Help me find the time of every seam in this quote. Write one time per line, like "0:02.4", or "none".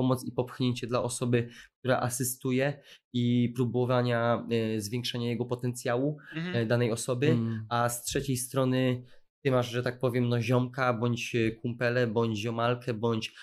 none